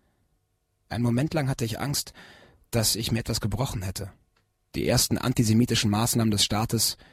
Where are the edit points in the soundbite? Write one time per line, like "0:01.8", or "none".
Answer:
0:04.7